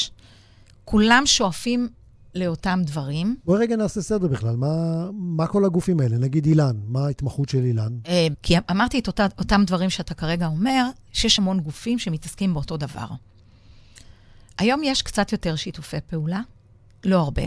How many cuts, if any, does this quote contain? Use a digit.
2